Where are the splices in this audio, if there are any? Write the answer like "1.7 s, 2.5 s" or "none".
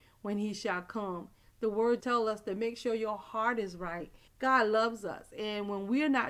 2.0 s, 4.3 s